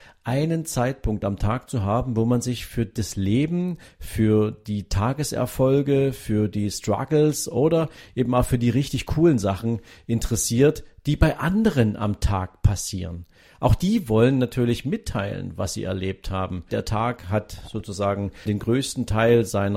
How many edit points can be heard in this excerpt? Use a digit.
2